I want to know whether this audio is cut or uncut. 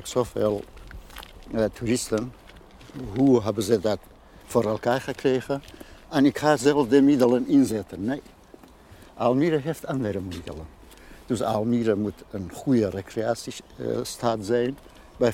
uncut